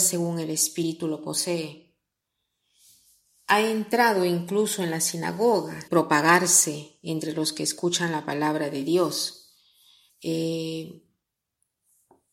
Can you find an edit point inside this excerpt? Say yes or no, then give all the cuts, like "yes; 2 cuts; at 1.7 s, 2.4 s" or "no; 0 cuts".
yes; 2 cuts; at 5.9 s, 10.1 s